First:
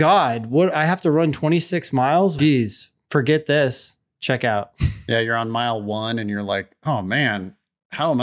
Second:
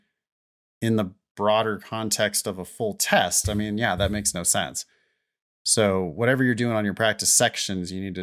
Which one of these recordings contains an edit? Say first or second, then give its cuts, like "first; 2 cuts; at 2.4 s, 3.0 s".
first; 1 cut; at 2.4 s